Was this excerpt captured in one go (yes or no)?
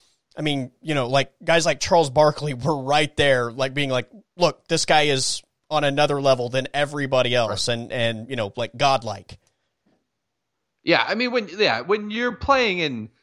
yes